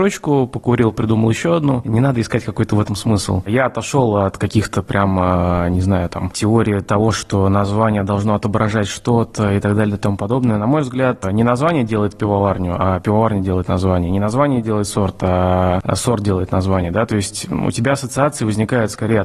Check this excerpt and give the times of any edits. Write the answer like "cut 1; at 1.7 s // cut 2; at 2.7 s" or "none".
none